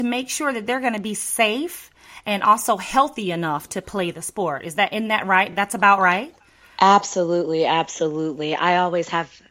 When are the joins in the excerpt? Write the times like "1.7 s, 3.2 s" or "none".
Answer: none